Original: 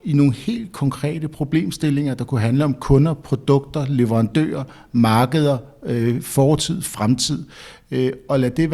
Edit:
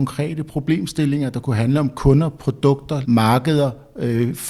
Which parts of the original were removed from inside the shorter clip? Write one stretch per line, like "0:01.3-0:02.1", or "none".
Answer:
0:03.9-0:04.9